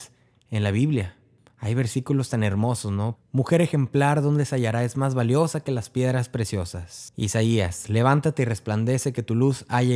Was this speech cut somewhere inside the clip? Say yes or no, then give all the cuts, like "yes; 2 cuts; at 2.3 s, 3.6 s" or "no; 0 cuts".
yes; 1 cut; at 3.1 s